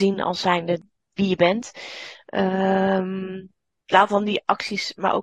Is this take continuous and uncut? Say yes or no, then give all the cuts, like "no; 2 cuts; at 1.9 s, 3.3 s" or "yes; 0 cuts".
no; 1 cut; at 3.8 s